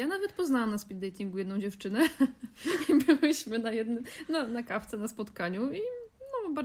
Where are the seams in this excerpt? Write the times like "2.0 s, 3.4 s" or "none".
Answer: none